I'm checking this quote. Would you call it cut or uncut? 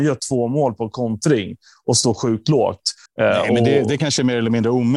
cut